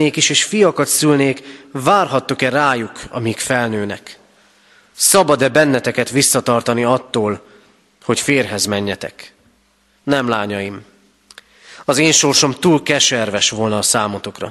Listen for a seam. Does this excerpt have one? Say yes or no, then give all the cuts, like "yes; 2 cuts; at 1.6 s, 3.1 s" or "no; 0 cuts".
no; 0 cuts